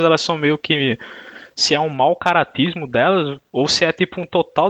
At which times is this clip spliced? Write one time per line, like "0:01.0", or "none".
none